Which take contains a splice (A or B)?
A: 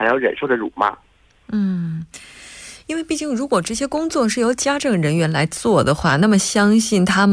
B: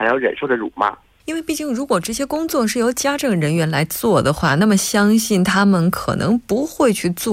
B